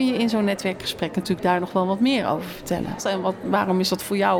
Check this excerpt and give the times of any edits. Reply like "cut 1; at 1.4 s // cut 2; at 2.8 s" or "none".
cut 1; at 3.0 s